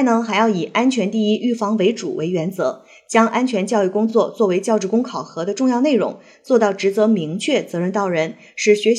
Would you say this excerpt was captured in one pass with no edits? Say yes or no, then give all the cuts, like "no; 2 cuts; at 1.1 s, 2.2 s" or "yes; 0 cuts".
yes; 0 cuts